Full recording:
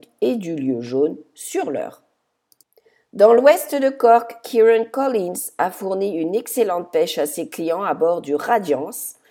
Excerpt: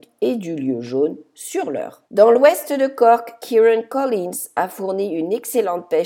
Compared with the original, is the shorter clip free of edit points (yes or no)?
no